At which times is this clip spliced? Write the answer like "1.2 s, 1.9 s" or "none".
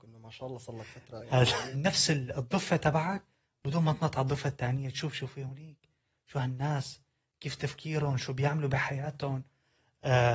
1.7 s

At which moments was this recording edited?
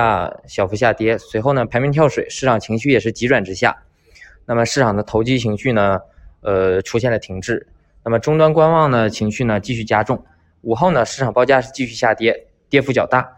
none

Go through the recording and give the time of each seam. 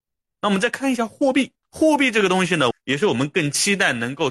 1.6 s, 2.7 s

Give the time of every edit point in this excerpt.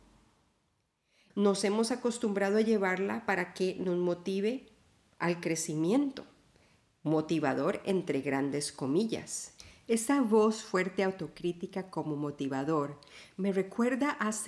1.3 s

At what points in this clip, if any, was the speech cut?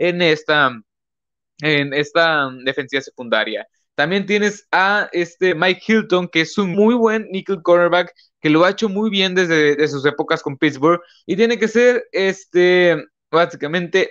6.7 s, 11.2 s

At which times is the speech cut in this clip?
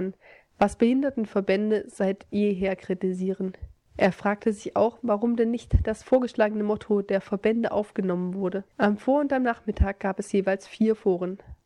8.7 s

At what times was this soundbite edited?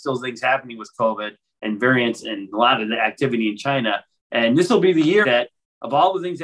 4.2 s, 5.2 s

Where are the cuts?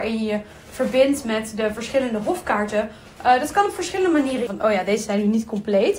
3.2 s, 4.5 s

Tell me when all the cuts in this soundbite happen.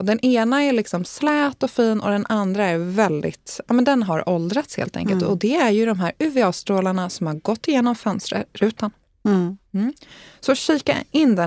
none

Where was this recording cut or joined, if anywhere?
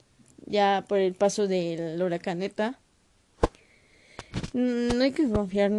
none

